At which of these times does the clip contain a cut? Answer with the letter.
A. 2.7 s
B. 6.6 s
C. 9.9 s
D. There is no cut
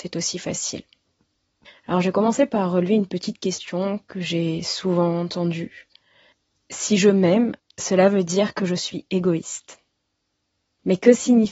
D